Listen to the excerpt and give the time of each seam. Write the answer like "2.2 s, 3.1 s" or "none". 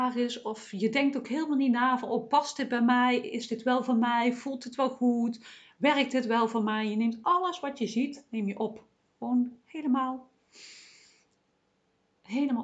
none